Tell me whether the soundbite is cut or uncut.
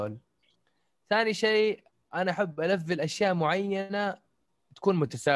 uncut